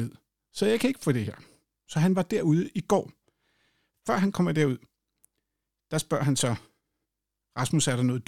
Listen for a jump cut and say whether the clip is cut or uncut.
cut